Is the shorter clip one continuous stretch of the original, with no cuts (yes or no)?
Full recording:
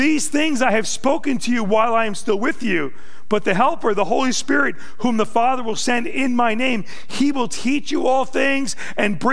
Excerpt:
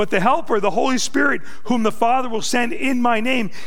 yes